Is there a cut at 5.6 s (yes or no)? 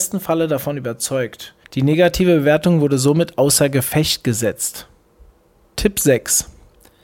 no